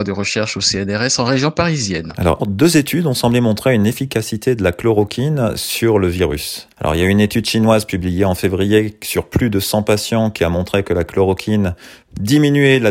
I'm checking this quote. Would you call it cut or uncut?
cut